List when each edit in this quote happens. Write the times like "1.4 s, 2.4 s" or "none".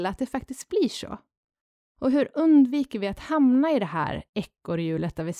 none